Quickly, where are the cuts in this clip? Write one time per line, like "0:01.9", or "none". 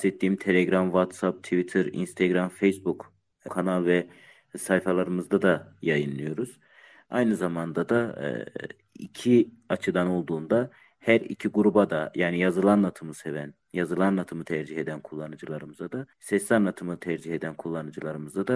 0:03.5
0:16.1